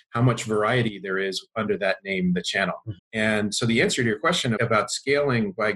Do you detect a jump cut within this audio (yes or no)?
yes